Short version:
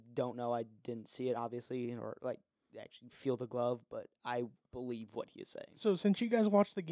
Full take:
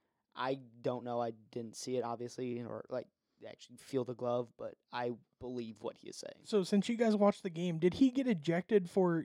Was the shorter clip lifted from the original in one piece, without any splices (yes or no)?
yes